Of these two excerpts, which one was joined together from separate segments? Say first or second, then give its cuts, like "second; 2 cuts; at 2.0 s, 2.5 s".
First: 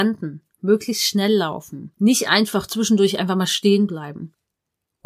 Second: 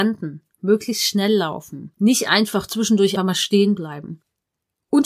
second; 1 cut; at 3.2 s